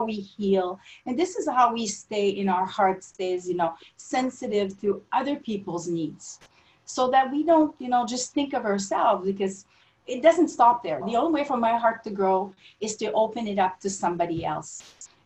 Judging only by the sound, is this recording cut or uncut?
uncut